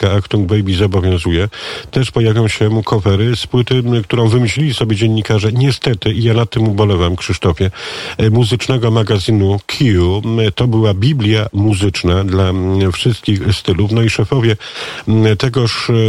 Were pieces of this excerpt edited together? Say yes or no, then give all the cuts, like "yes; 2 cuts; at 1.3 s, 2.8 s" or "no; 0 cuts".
no; 0 cuts